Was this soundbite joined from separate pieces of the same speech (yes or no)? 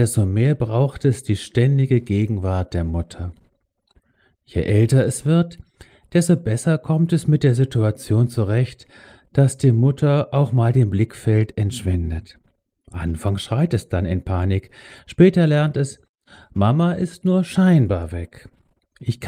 no